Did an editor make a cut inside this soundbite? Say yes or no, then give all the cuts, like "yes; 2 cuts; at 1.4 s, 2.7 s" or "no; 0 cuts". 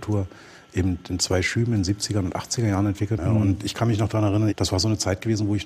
yes; 2 cuts; at 3.2 s, 4.5 s